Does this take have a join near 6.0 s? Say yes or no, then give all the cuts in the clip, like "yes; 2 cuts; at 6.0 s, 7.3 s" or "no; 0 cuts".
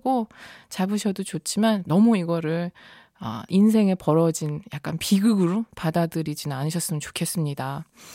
no; 1 cut; at 3.5 s